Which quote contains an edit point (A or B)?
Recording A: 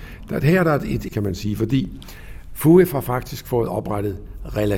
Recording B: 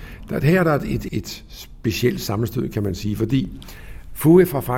A